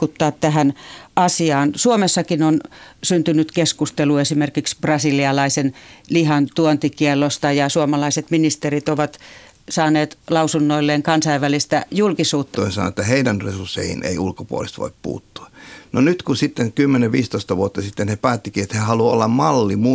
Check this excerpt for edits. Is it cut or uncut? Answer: cut